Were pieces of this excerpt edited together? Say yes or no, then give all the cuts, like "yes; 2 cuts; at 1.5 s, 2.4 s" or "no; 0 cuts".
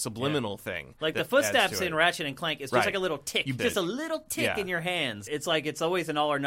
yes; 2 cuts; at 3.6 s, 5.3 s